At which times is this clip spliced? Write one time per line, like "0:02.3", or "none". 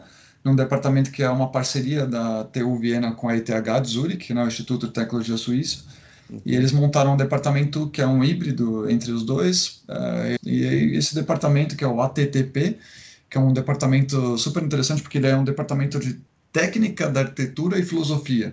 0:10.4

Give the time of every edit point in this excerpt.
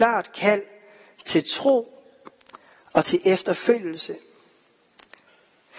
none

